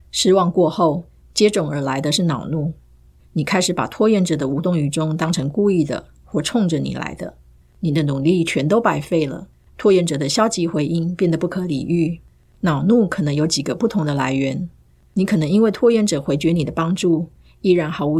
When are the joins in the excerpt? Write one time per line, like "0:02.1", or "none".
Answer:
0:15.0